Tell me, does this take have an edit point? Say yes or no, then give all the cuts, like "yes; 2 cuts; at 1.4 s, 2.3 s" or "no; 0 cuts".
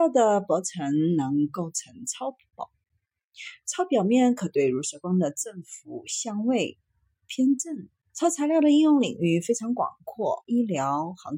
yes; 2 cuts; at 8.1 s, 10.4 s